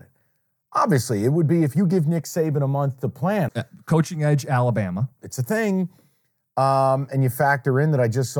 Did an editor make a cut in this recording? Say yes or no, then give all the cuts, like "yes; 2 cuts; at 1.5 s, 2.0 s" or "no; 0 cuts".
yes; 2 cuts; at 3.5 s, 5.2 s